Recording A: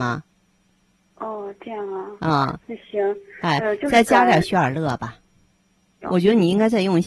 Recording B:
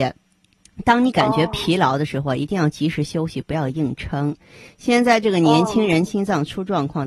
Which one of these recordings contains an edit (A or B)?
A